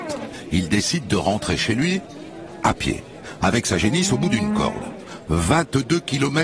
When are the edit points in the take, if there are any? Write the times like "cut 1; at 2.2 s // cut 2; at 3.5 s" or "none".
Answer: none